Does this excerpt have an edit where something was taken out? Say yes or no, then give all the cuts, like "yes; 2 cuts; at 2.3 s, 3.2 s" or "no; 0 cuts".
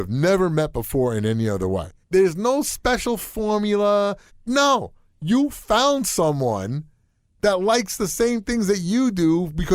yes; 2 cuts; at 2.0 s, 4.3 s